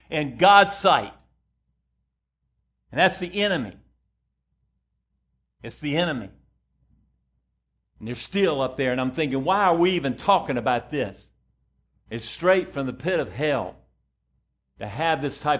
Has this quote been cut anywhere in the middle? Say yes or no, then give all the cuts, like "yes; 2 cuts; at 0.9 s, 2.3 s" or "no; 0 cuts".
no; 0 cuts